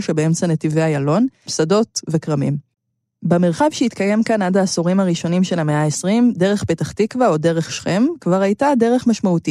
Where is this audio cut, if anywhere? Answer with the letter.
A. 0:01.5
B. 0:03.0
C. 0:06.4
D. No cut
A